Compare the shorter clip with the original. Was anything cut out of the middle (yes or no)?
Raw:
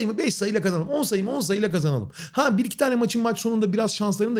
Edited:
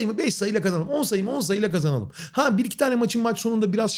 no